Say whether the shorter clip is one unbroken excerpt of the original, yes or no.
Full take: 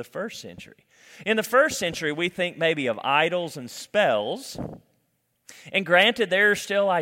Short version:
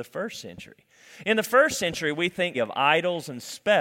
no